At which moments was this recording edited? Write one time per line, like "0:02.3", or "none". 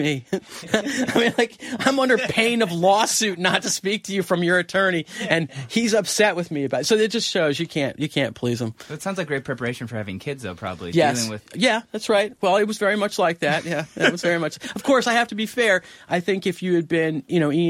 none